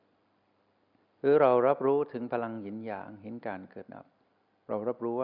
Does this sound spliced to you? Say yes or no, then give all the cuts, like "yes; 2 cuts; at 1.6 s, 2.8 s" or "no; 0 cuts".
yes; 1 cut; at 3.9 s